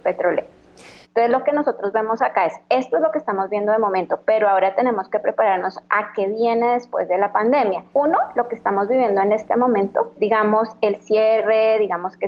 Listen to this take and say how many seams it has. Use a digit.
3